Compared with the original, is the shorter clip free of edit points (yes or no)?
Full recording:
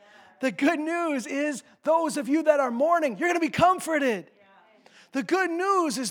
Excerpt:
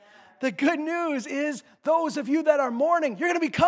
yes